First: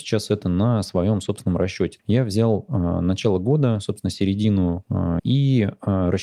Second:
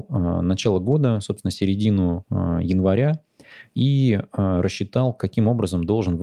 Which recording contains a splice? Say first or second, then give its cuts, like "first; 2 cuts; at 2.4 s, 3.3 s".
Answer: first; 2 cuts; at 2.0 s, 5.2 s